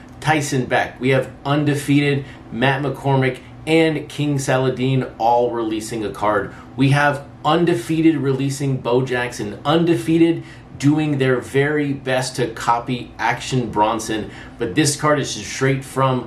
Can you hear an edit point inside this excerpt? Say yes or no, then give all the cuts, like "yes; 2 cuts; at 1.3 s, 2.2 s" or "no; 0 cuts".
no; 0 cuts